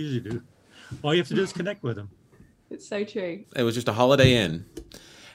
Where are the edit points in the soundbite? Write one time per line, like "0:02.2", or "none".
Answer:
0:03.4